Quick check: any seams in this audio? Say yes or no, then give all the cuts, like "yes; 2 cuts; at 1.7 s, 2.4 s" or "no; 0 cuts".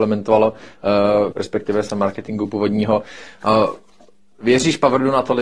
yes; 1 cut; at 1.3 s